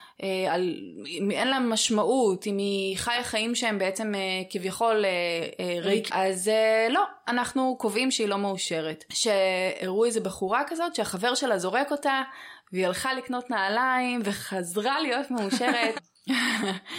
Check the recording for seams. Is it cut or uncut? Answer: cut